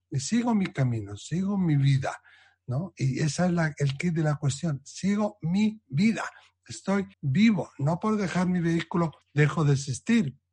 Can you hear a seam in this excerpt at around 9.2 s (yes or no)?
yes